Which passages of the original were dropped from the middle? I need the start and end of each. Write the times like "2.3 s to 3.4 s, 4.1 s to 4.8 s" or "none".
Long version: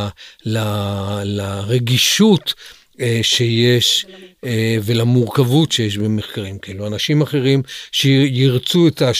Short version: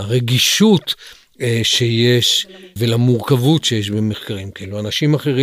4.4 s to 4.8 s